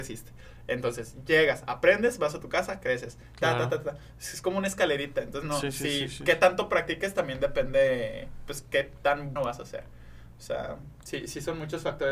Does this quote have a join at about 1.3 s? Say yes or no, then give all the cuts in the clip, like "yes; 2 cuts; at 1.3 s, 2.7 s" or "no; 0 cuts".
no; 1 cut; at 9.4 s